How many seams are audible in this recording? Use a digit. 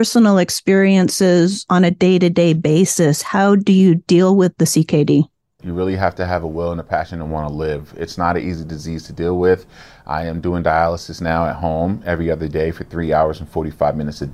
1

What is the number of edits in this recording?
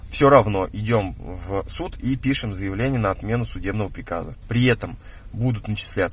1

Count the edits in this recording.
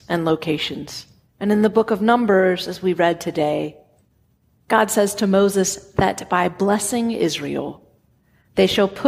1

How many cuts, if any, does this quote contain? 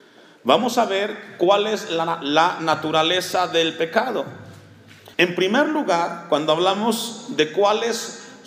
1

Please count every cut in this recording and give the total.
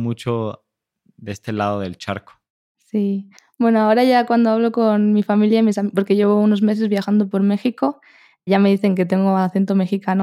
0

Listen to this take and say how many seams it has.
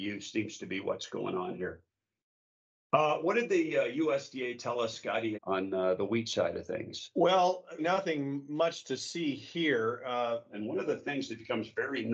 3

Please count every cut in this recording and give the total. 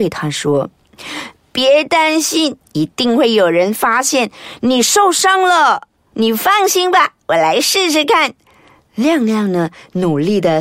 2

